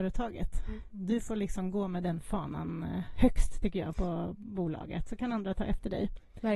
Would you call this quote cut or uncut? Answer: uncut